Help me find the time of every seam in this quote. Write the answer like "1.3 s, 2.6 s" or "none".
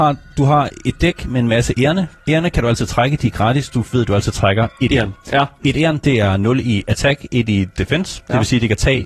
none